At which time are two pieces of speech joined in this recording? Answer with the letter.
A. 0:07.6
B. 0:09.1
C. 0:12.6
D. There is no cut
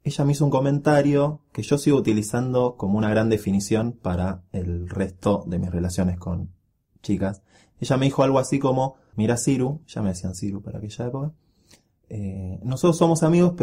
B